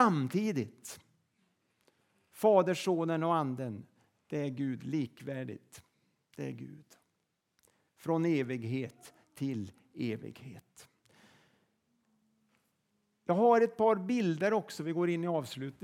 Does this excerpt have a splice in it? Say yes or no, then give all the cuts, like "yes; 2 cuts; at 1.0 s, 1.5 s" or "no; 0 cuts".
no; 0 cuts